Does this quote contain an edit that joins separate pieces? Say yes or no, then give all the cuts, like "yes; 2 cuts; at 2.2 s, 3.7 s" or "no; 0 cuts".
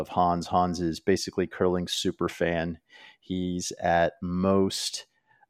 no; 0 cuts